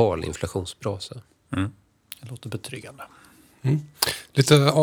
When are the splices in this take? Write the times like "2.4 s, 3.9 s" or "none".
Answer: none